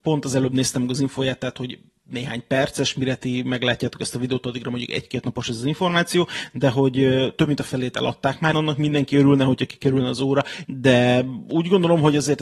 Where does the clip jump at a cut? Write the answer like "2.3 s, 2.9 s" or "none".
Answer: 8.5 s, 10.6 s